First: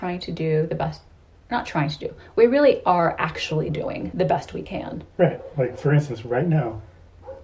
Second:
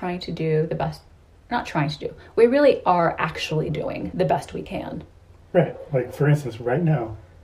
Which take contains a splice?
first; 1 cut; at 5.1 s

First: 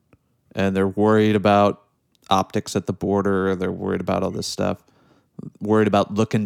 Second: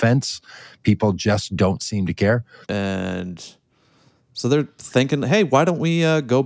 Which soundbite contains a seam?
second; 1 cut; at 2.6 s

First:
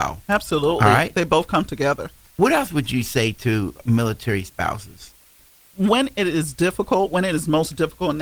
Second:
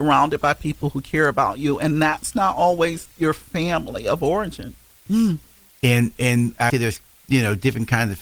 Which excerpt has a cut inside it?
second; 2 cuts; at 5.1 s, 6.7 s

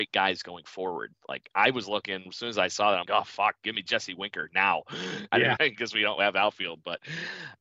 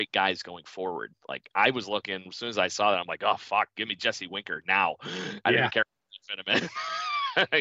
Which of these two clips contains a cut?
first; 2 cuts; at 3.1 s, 5.6 s

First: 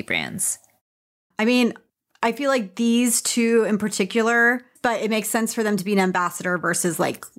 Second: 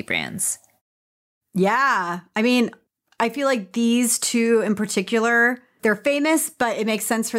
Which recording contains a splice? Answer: first; 2 cuts; at 1.3 s, 4.8 s

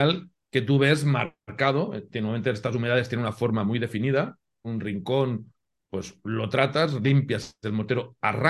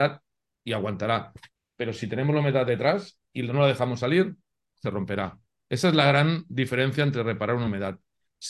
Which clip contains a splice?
first; 1 cut; at 4.6 s

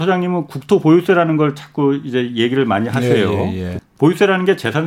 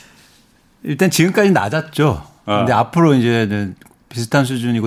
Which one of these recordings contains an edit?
first; 1 cut; at 3.8 s

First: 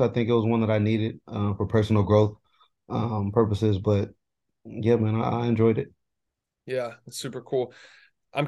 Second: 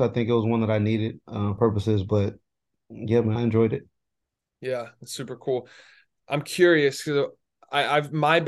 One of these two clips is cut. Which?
second; 2 cuts; at 1.6 s, 3.4 s

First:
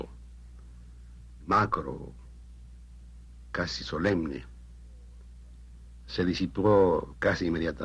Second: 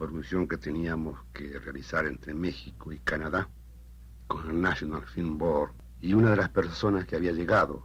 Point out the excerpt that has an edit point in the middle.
first; 1 cut; at 1.4 s

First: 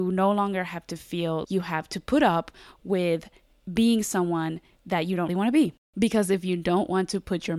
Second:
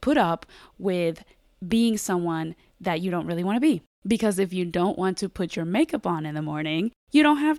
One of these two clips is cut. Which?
first; 2 cuts; at 1.4 s, 5.3 s

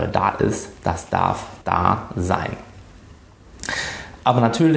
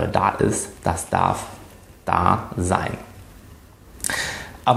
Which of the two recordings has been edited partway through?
first; 1 cut; at 1.6 s

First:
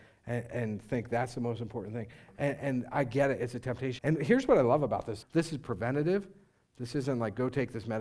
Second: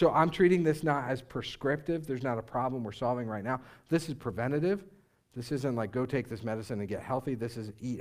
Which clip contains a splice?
first; 2 cuts; at 4.0 s, 5.2 s

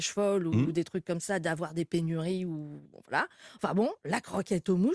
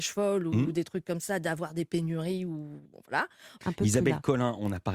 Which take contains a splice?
second; 1 cut; at 3.6 s

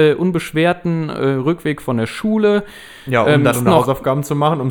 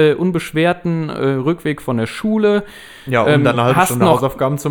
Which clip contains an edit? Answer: first; 1 cut; at 3.5 s

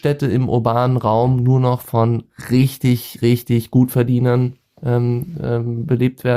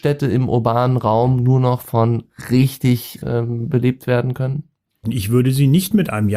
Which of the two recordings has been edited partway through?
second; 2 cuts; at 3.2 s, 5.0 s

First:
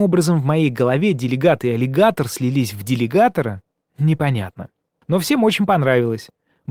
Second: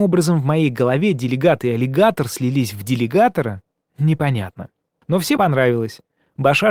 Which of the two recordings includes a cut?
second; 1 cut; at 5.4 s

